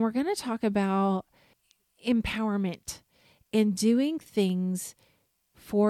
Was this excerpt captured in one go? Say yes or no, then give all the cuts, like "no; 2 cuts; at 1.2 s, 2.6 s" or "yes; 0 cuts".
yes; 0 cuts